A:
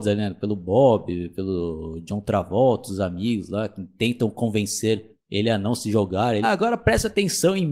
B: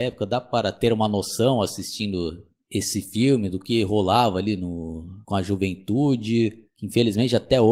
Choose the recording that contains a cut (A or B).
A